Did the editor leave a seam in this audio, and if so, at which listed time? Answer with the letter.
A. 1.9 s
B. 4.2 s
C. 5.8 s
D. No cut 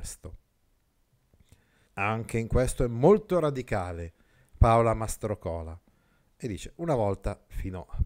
A